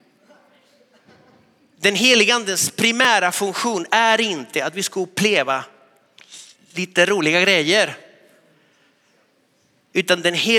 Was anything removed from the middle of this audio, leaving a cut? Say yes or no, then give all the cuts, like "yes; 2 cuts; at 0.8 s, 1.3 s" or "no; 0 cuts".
no; 0 cuts